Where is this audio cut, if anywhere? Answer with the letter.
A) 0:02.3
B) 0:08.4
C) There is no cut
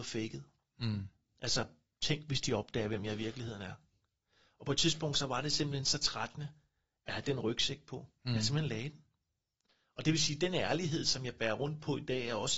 C